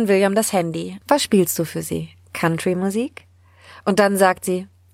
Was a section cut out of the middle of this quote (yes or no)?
yes